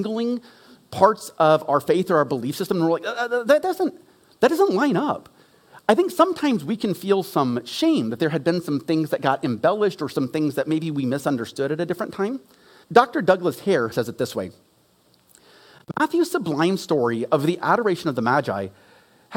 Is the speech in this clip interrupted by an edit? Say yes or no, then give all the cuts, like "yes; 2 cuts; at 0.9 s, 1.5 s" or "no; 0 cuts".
yes; 2 cuts; at 12.8 s, 13.9 s